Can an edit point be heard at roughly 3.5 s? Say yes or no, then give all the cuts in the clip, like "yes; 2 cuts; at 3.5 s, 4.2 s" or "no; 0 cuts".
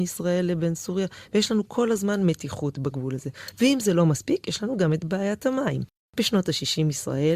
no; 0 cuts